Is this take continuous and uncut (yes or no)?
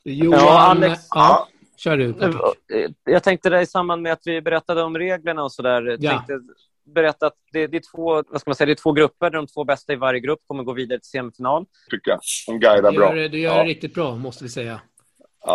no